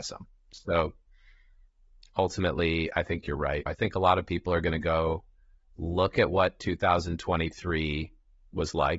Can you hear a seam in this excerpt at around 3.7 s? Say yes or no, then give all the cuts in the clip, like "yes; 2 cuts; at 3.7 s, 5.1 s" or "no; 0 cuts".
yes; 1 cut; at 3.7 s